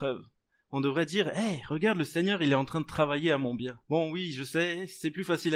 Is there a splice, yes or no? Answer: yes